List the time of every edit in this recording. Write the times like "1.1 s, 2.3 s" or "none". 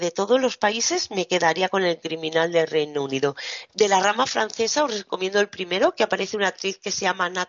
3.7 s